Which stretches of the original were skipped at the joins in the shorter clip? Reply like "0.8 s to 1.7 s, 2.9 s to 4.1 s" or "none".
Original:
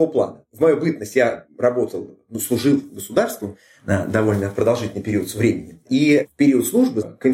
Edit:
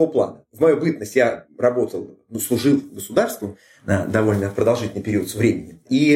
none